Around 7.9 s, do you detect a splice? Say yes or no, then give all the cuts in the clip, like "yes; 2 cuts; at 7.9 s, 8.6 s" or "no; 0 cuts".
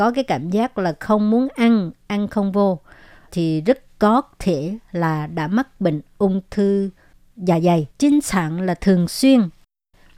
yes; 2 cuts; at 3.3 s, 7.9 s